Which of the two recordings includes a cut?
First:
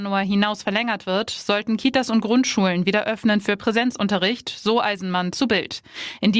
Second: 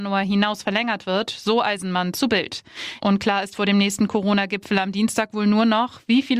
second; 2 cuts; at 1.2 s, 3.0 s

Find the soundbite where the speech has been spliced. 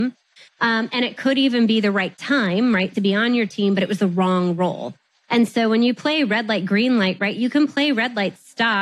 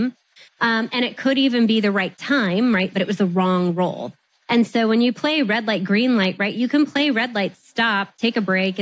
second; 1 cut; at 2.9 s

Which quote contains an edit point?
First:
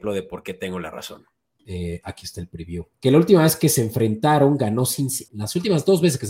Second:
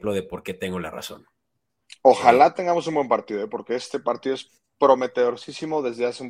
first; 3 cuts; at 1.6 s, 2.9 s, 5.3 s

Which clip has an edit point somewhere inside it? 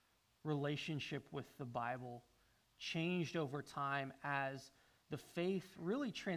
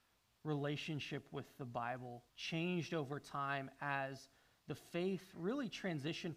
second; 1 cut; at 2.3 s

